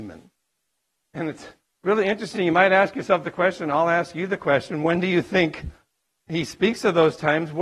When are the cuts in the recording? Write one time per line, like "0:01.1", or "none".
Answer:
none